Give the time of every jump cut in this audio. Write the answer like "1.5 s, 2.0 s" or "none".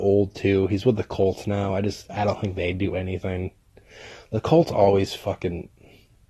none